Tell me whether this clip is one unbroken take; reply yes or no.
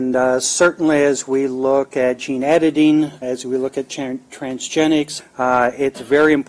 no